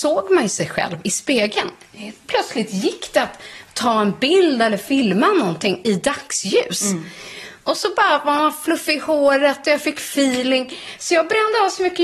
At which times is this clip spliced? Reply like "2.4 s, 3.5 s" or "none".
none